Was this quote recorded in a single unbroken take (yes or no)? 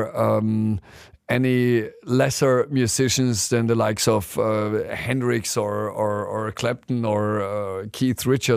yes